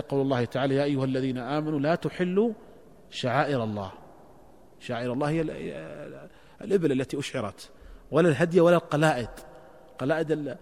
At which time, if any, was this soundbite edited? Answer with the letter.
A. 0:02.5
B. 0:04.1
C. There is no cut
C